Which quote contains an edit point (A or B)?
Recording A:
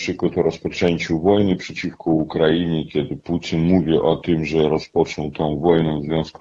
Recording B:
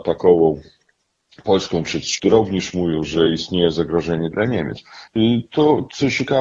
B